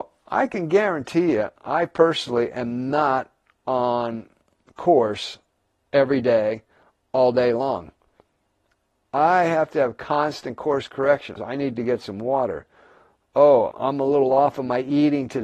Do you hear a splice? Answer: yes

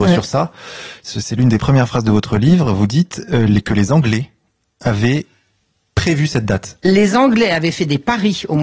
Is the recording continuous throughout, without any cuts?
yes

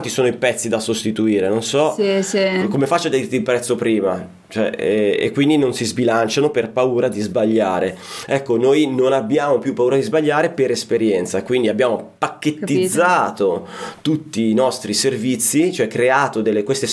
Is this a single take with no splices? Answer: yes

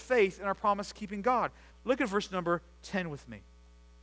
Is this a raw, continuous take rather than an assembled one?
no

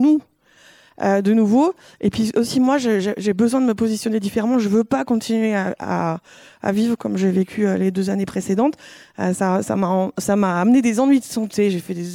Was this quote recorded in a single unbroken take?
yes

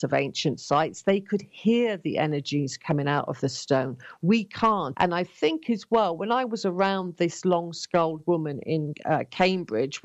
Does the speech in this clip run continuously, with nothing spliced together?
no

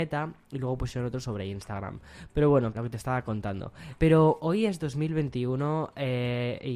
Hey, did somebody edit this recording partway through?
yes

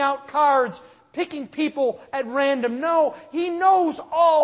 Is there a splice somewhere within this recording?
no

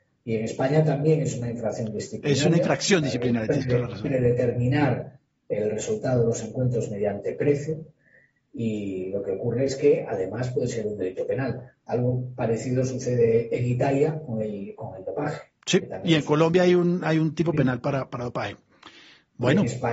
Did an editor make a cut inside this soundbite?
no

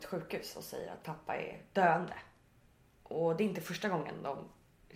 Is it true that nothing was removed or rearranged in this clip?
yes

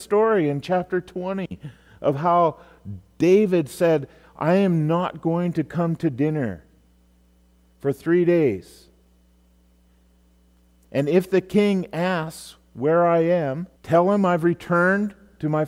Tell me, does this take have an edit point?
yes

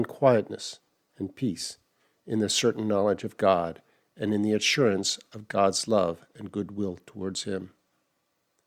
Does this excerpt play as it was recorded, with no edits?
yes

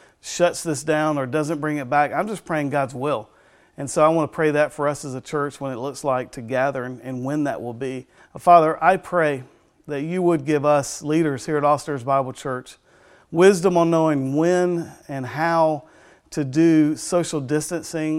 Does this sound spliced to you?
yes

